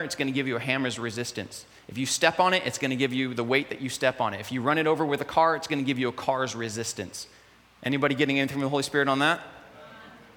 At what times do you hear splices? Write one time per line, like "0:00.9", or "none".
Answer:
none